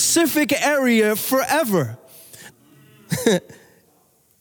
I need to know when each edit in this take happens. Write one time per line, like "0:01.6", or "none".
0:02.5